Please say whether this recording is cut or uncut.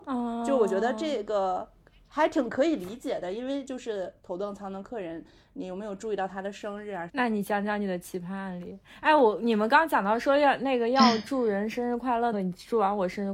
cut